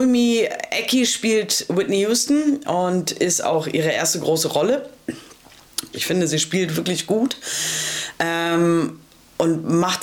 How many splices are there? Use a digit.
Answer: 1